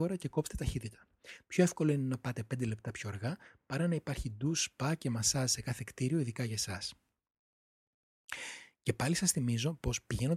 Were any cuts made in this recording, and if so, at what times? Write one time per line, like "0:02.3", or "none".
none

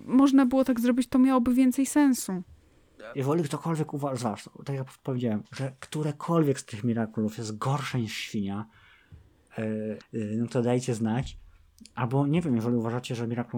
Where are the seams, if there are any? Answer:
0:03.1
0:05.4
0:10.0

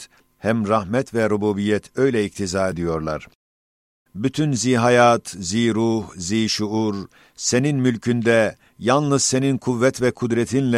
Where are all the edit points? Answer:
0:04.1

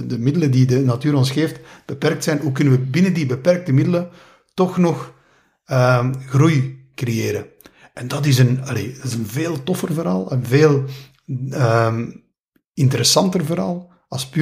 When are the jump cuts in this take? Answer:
none

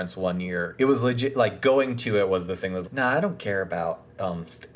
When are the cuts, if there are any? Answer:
0:02.8

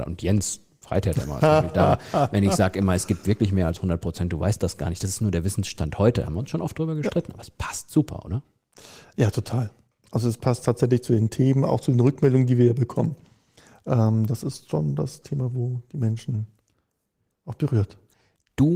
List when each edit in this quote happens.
none

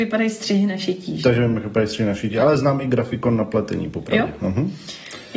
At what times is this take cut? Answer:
none

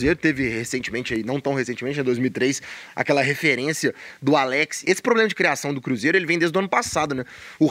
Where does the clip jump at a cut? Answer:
0:04.8

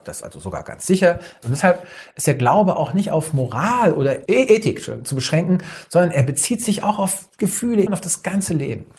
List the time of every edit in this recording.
0:01.4
0:04.3
0:07.9

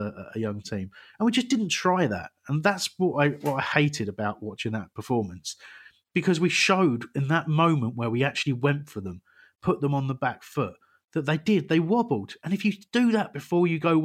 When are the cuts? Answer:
none

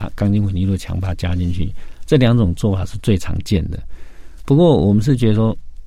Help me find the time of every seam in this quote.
none

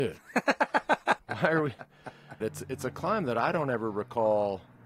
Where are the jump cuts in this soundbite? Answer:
0:01.2
0:02.4

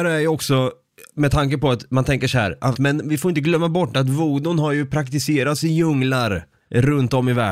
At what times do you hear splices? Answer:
0:02.7

